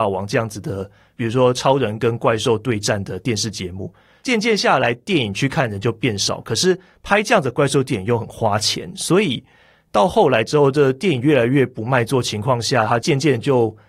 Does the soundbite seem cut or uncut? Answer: uncut